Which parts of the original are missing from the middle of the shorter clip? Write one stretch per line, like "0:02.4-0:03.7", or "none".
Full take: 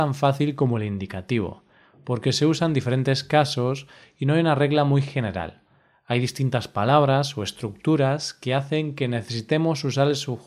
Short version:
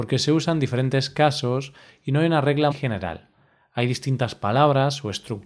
0:04.8-0:05.0